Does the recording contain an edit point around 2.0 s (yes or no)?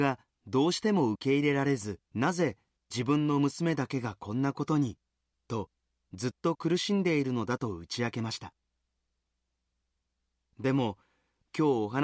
yes